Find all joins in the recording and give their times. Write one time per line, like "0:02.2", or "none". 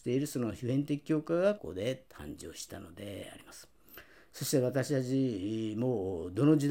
0:01.6